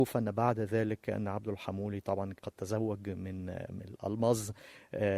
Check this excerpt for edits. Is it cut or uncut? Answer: uncut